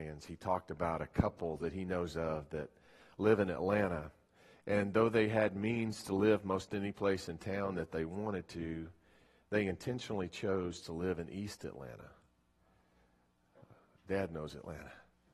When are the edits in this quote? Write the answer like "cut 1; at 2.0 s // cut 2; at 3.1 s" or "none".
none